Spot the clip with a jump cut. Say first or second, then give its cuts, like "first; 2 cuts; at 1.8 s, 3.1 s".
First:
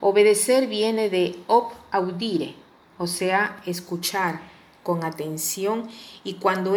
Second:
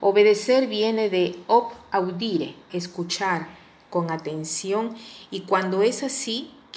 second; 1 cut; at 2.7 s